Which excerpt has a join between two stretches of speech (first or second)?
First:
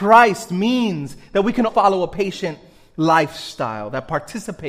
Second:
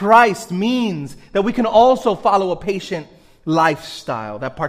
first